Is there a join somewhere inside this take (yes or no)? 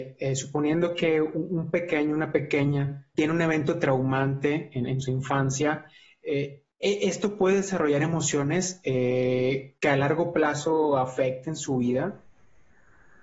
yes